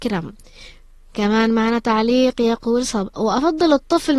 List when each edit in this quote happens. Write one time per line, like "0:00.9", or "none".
0:03.1

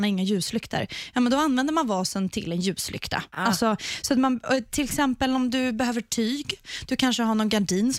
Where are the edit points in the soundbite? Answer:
none

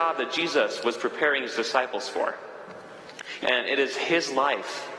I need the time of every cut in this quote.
0:03.4

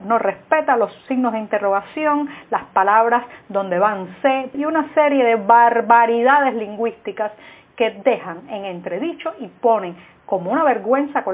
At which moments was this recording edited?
0:04.5

